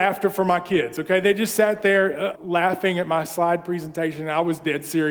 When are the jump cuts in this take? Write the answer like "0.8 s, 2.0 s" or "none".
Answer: 2.4 s